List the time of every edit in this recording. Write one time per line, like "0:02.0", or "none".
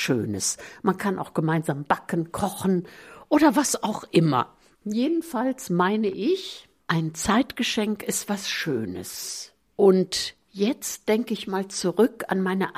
none